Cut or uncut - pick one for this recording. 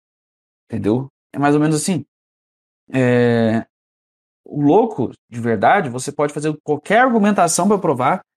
cut